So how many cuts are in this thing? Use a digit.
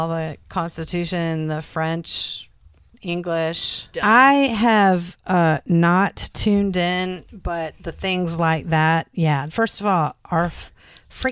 2